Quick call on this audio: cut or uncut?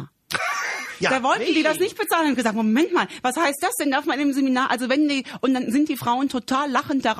uncut